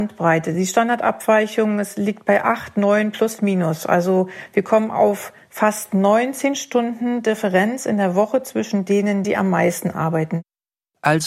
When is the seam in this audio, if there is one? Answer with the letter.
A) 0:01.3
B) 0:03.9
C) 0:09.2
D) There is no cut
C